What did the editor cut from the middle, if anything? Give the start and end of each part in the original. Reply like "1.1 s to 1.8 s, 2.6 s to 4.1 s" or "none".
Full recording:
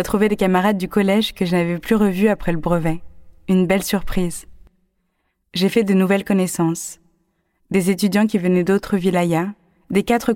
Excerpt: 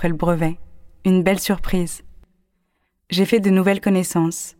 none